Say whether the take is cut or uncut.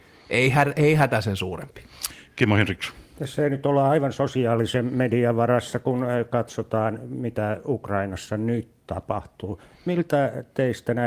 uncut